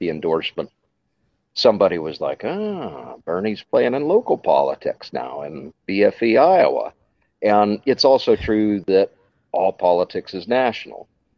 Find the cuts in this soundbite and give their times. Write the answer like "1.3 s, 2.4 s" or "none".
5.8 s